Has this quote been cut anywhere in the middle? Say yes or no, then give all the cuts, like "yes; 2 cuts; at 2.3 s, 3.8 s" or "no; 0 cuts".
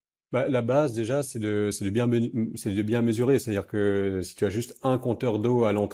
no; 0 cuts